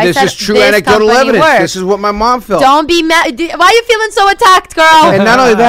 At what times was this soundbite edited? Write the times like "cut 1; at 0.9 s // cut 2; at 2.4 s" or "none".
none